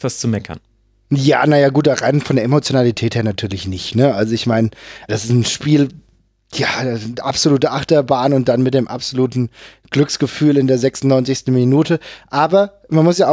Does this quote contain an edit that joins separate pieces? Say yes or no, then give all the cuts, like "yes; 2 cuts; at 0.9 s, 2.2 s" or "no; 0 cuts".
yes; 1 cut; at 5.1 s